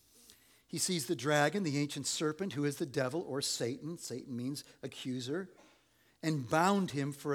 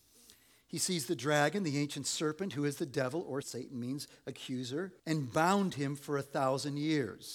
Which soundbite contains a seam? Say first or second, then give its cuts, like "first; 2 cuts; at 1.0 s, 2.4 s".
second; 2 cuts; at 3.4 s, 5.0 s